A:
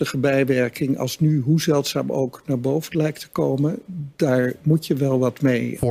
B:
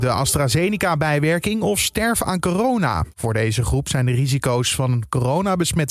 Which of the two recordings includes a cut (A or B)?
B